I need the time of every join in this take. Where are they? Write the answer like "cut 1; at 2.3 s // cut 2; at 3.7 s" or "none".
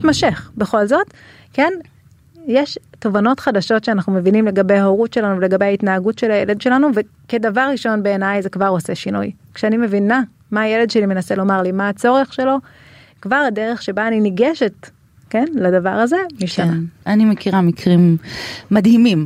none